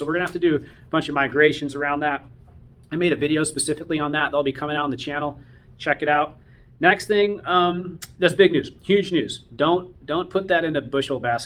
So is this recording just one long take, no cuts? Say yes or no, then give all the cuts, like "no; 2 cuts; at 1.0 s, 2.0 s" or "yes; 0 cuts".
yes; 0 cuts